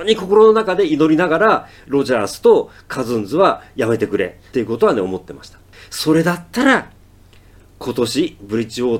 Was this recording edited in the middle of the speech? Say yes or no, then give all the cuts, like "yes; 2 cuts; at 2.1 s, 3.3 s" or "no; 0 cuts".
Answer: yes; 1 cut; at 4.5 s